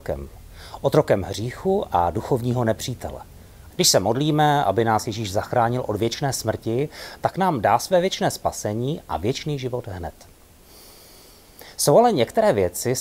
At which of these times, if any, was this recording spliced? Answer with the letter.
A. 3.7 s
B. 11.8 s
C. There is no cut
A